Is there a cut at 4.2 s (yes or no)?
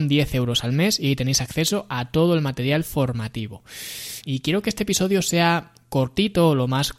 yes